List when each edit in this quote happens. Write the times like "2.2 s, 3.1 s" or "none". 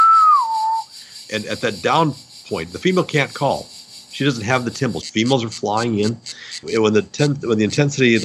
5.0 s, 6.6 s